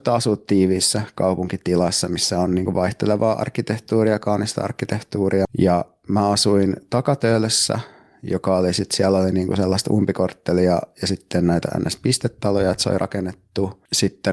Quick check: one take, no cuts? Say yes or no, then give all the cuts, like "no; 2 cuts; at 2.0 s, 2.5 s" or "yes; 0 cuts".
no; 1 cut; at 5.4 s